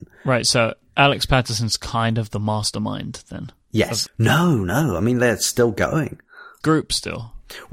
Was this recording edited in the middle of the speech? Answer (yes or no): yes